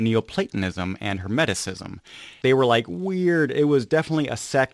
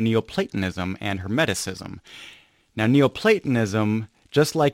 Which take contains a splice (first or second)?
first